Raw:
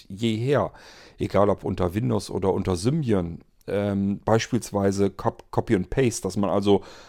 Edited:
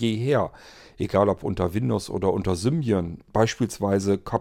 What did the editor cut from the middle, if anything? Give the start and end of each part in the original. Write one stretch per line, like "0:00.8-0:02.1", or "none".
0:03.5-0:04.2